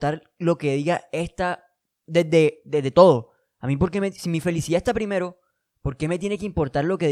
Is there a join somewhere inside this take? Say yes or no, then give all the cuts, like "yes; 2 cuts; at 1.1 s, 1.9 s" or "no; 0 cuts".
no; 0 cuts